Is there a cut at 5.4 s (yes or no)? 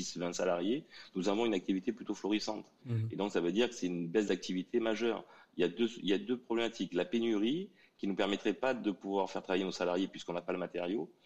no